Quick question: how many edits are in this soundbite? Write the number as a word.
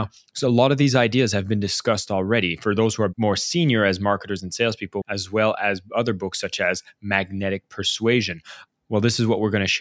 two